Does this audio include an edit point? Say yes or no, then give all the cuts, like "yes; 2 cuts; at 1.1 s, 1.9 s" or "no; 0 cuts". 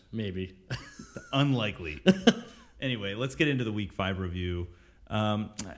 no; 0 cuts